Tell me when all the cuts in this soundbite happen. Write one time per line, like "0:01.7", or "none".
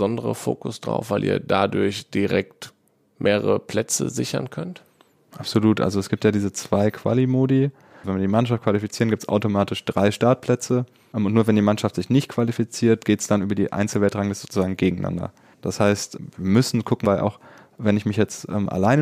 0:08.0
0:15.5
0:17.0